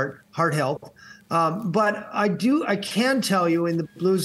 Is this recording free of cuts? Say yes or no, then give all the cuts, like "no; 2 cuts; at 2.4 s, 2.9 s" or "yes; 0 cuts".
yes; 0 cuts